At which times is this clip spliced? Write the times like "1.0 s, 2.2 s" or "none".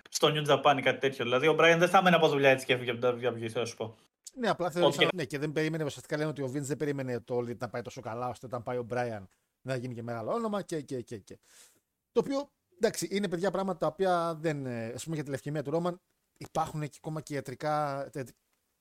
5.1 s